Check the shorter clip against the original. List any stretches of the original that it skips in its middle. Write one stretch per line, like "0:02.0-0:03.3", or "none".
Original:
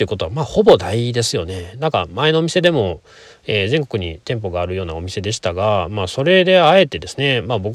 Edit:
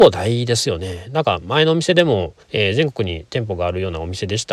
0:03.1-0:03.4